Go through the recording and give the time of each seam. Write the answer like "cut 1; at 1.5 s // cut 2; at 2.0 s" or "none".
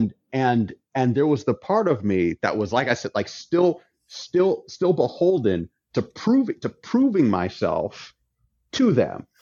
none

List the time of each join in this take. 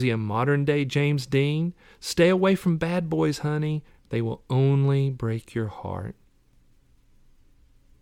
none

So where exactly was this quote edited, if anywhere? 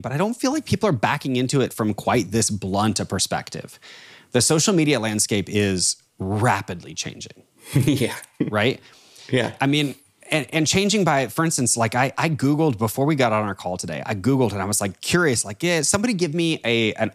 none

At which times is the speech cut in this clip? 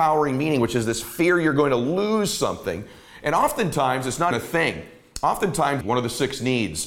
cut 1; at 4.3 s // cut 2; at 5.8 s

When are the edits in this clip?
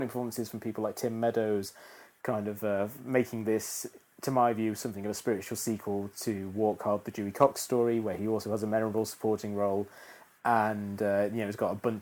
none

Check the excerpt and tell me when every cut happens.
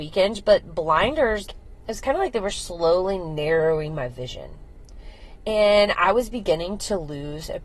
cut 1; at 1.5 s

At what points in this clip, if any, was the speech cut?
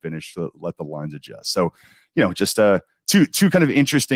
none

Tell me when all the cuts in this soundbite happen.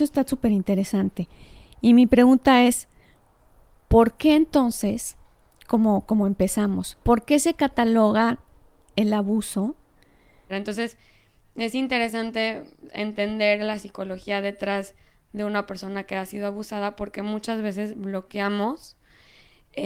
cut 1; at 7.0 s // cut 2; at 10.5 s

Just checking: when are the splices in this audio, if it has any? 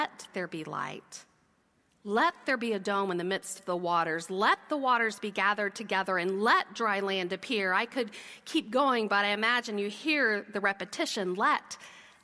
none

